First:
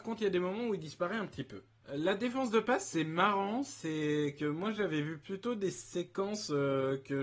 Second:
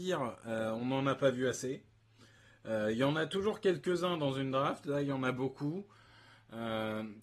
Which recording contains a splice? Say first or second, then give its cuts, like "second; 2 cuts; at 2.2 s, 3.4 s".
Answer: first; 1 cut; at 1.8 s